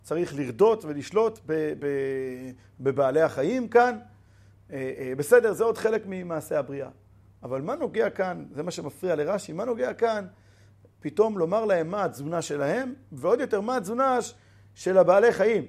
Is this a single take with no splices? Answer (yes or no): yes